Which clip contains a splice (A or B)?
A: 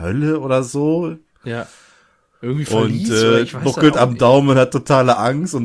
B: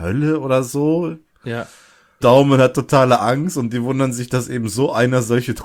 B